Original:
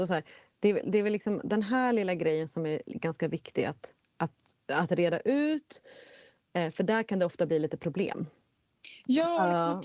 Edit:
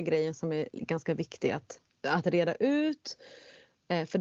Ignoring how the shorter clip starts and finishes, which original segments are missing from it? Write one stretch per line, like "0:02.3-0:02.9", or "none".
0:04.1-0:04.6